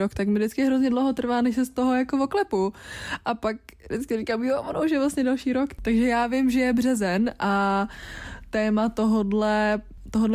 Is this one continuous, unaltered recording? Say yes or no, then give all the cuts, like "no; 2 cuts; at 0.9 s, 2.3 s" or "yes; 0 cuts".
yes; 0 cuts